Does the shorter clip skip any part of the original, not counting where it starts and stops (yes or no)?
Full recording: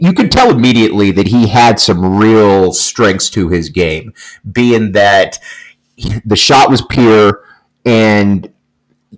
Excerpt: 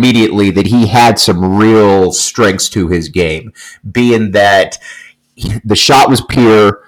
no